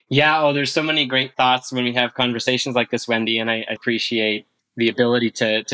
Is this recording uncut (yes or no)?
no